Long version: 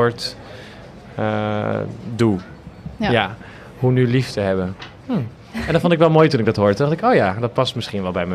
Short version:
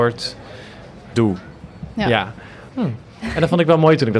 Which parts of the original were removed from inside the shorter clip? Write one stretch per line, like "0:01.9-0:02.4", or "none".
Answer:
0:01.1-0:02.2
0:03.7-0:05.0